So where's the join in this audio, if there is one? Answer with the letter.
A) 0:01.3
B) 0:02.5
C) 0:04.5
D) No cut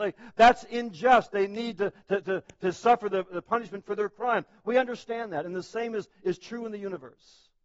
D